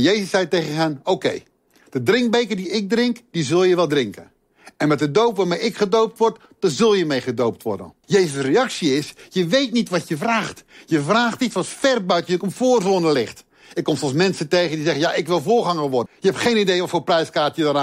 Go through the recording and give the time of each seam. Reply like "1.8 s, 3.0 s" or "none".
8.0 s, 16.1 s